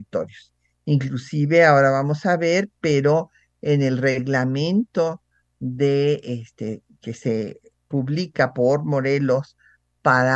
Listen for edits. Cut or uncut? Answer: uncut